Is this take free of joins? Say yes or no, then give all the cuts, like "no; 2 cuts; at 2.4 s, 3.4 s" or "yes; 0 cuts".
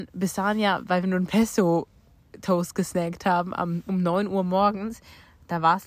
yes; 0 cuts